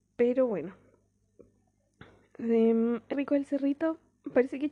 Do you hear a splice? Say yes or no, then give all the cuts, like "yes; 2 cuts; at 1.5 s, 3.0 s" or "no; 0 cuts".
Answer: yes; 1 cut; at 3.1 s